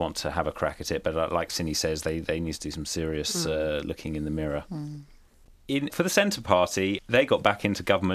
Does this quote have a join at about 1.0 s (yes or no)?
no